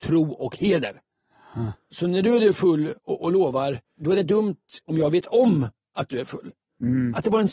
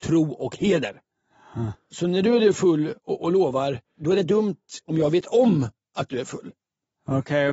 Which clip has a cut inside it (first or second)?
first